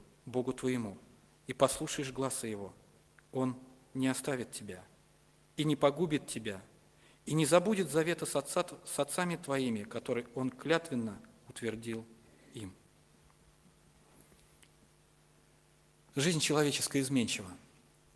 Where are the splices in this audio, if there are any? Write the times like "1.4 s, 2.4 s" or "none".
3.2 s